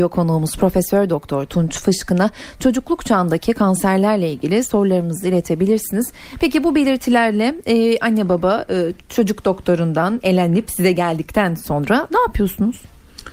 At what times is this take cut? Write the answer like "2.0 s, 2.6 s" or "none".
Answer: none